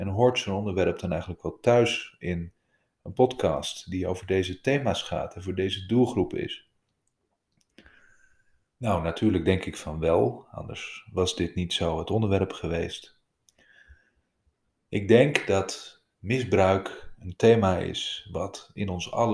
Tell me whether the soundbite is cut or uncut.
uncut